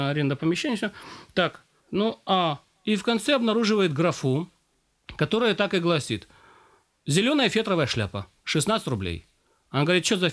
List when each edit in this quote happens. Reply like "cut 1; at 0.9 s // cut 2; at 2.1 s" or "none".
none